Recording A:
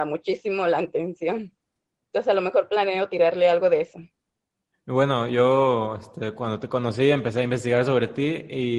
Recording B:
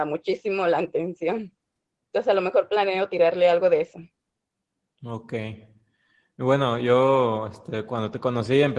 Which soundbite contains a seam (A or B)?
A